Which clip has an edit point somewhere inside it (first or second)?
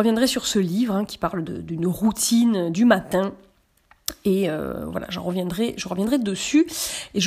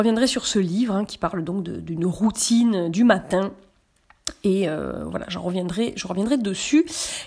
first